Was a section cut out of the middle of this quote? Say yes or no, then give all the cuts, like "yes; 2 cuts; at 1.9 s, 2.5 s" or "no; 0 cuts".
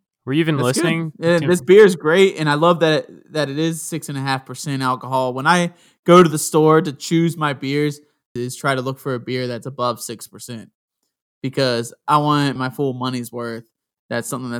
yes; 2 cuts; at 8.4 s, 12.6 s